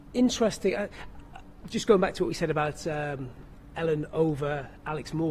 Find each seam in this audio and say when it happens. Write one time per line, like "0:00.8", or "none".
none